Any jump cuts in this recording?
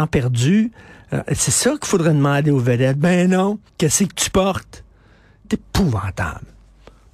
yes; 2 cuts; at 3.7 s, 5.4 s

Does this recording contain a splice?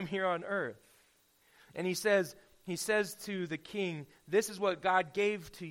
no; 0 cuts

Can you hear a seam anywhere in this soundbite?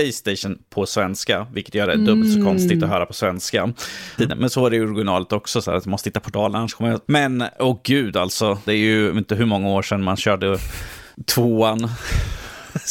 yes; 3 cuts; at 4.2 s, 7.1 s, 8.7 s

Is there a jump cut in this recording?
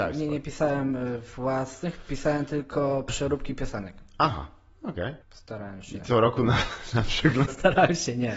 yes; 2 cuts; at 5.2 s, 7.5 s

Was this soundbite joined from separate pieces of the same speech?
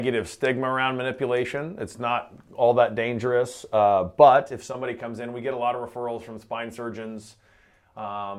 no; 0 cuts

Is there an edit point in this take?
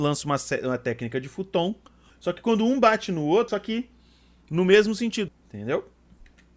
yes; 3 cuts; at 2.1 s, 3.5 s, 5.3 s

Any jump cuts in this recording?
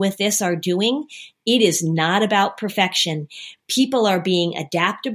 no; 0 cuts

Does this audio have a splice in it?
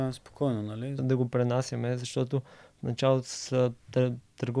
yes; 1 cut; at 1.0 s

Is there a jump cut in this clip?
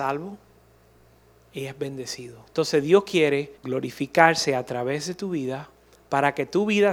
yes; 2 cuts; at 2.5 s, 3.5 s

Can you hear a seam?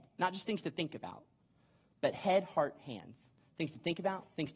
no; 0 cuts

